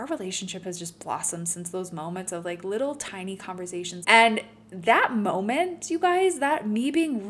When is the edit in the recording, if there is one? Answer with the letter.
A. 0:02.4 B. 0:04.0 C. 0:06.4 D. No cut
B